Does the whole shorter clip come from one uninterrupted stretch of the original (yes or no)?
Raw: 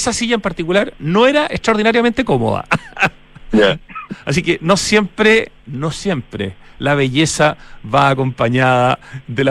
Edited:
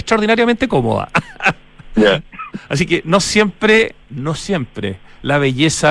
yes